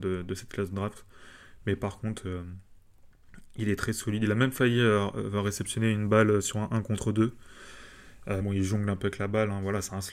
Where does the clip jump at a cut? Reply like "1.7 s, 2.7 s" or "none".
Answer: 8.4 s